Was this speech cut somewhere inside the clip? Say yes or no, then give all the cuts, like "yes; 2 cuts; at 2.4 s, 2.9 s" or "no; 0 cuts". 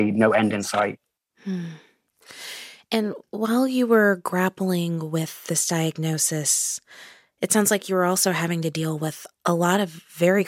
no; 0 cuts